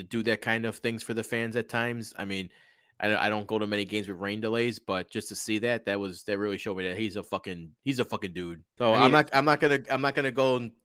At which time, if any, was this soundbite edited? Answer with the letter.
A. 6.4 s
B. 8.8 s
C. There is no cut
B